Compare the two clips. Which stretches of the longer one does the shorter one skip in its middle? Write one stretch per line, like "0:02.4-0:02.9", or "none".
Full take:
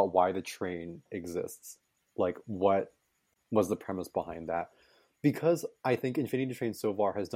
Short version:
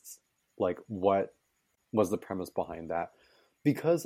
none